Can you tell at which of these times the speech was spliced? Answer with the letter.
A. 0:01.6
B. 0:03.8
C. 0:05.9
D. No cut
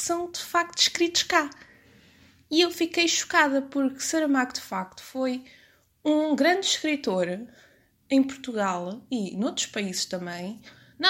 D